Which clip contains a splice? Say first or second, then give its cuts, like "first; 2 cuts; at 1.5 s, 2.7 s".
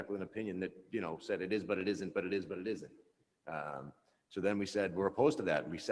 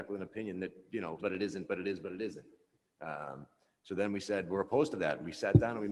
second; 1 cut; at 1.2 s